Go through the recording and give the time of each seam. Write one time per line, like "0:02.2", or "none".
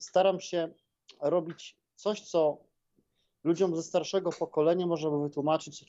none